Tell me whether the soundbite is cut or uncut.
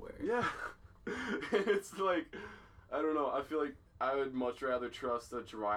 cut